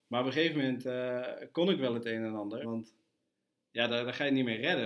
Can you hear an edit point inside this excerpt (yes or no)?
yes